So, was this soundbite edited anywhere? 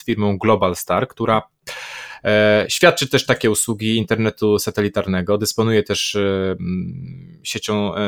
no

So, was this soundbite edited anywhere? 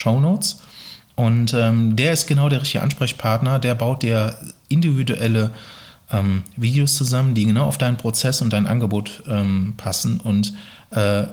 no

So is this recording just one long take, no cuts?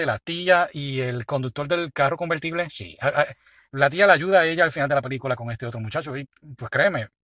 yes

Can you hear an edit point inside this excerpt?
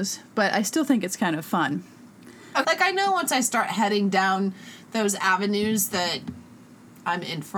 yes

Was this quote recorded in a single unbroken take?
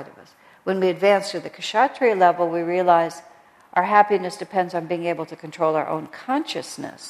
yes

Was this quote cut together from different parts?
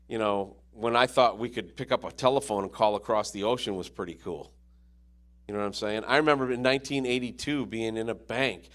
no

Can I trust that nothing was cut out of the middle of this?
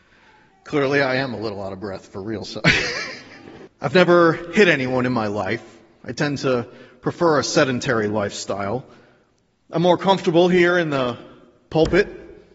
no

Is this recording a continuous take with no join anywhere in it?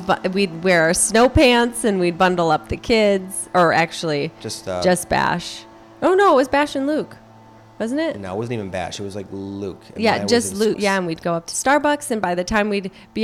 no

